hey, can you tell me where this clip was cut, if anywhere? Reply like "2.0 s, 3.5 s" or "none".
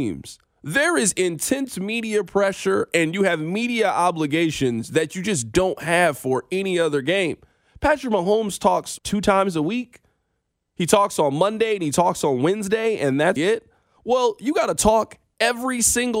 9.0 s, 13.4 s